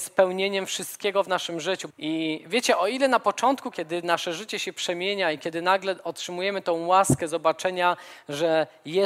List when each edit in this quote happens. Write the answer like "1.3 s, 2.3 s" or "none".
1.9 s, 3.7 s